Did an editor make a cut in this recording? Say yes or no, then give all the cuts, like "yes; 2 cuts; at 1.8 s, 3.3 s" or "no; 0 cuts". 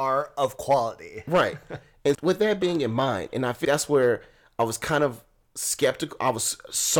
yes; 2 cuts; at 2.1 s, 3.6 s